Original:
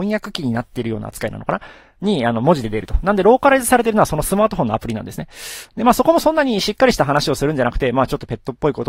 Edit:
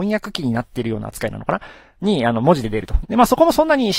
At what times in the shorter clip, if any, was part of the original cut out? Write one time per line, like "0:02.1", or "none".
0:03.0